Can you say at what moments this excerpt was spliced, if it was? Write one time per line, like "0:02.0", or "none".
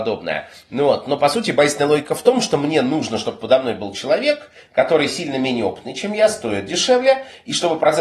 none